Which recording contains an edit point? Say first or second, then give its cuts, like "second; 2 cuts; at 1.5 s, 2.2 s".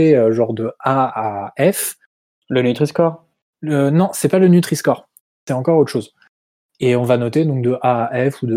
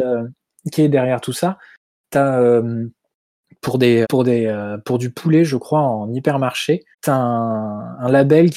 second; 2 cuts; at 4.0 s, 6.9 s